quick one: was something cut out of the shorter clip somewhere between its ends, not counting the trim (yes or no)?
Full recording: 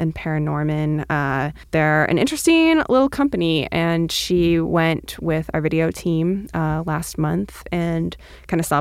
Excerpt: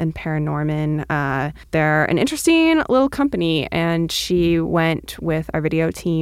no